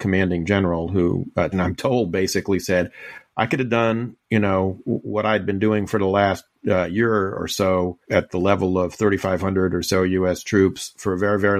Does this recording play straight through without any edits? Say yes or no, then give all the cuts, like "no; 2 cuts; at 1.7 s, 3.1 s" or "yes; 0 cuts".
no; 1 cut; at 1.5 s